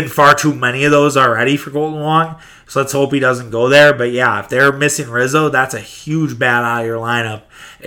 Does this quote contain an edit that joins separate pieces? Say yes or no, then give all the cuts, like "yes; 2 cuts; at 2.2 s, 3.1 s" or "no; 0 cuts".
no; 0 cuts